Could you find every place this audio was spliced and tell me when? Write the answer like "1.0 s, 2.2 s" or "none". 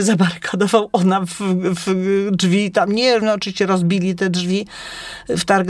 3.2 s